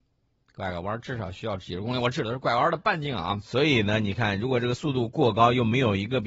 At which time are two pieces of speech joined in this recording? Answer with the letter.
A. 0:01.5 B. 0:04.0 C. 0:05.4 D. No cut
D